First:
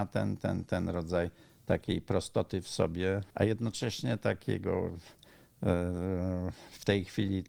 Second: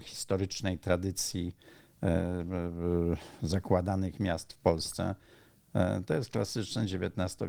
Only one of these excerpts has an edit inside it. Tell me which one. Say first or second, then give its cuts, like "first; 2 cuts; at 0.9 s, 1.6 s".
first; 1 cut; at 3.3 s